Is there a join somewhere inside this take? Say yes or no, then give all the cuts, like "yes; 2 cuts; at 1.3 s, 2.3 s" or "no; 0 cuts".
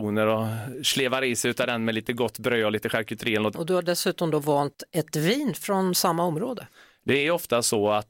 yes; 1 cut; at 3.5 s